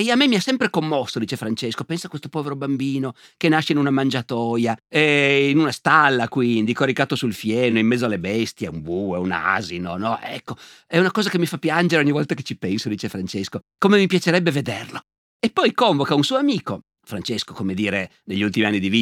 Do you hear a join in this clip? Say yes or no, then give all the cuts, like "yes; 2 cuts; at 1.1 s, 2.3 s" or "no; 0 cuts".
no; 0 cuts